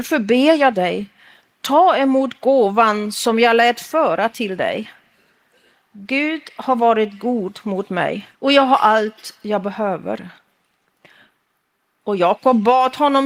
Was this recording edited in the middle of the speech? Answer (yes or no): yes